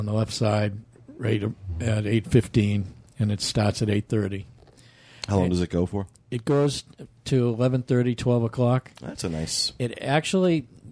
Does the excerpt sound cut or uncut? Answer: uncut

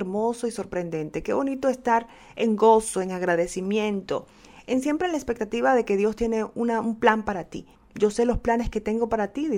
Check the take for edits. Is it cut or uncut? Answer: cut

